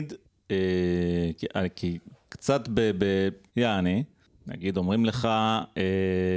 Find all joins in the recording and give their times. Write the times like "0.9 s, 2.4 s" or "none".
3.5 s